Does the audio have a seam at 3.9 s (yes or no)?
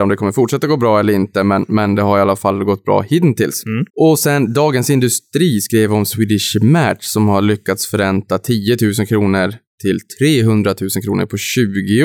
yes